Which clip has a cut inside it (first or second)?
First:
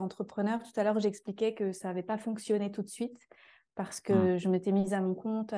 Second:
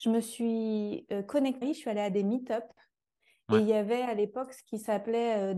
second